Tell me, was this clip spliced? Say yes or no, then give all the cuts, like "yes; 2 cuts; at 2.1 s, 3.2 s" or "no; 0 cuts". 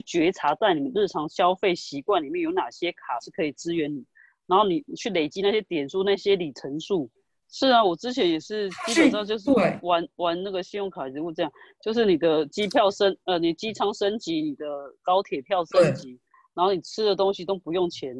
yes; 1 cut; at 7.4 s